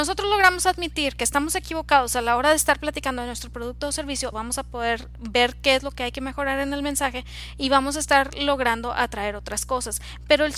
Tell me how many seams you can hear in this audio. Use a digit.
1